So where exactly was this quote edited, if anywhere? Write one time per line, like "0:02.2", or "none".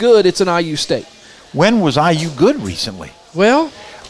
none